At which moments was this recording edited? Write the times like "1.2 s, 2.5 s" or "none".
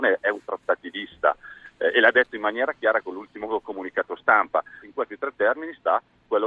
4.8 s

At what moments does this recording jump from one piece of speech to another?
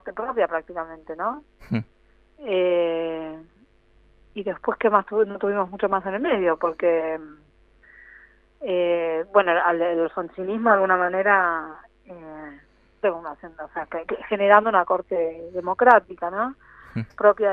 13.0 s

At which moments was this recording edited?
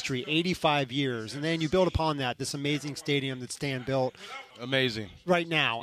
4.5 s

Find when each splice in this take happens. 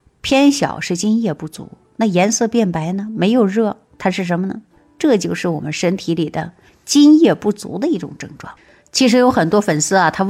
none

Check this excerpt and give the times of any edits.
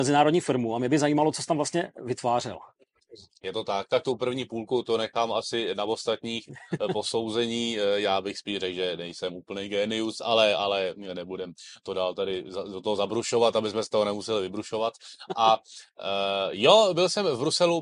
none

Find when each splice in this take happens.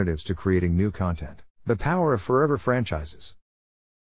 1.5 s

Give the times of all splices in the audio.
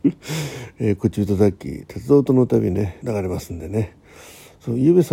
3.0 s

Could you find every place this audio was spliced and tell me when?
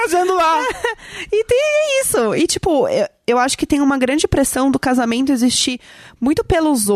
none

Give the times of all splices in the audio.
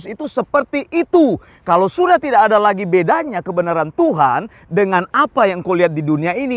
none

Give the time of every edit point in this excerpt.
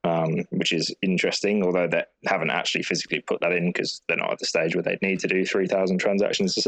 none

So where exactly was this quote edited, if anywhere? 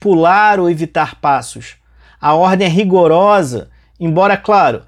none

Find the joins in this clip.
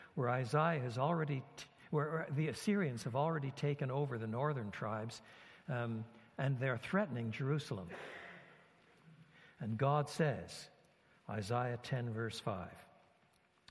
none

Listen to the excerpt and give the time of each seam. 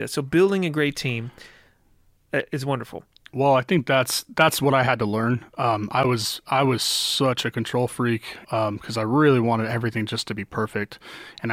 8.4 s

